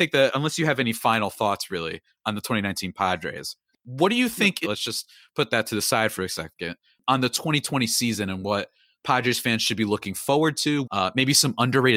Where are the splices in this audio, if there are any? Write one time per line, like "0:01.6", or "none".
0:04.6
0:10.8